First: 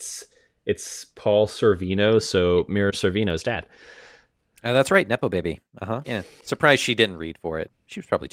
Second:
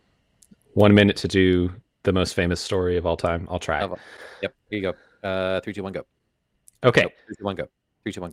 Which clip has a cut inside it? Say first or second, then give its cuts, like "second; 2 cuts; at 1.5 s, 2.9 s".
first; 1 cut; at 6.0 s